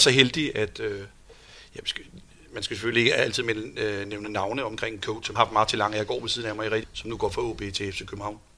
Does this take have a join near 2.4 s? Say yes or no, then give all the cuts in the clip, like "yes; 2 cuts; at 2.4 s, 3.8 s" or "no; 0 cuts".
no; 2 cuts; at 5.4 s, 6.8 s